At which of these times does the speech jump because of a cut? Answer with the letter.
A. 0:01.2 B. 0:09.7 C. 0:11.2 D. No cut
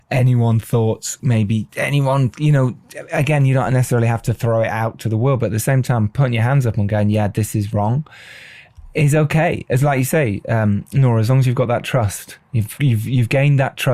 A